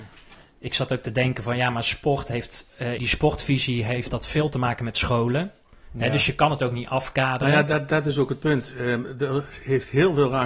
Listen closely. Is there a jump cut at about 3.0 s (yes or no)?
yes